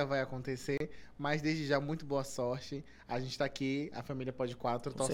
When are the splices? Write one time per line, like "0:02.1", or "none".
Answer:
none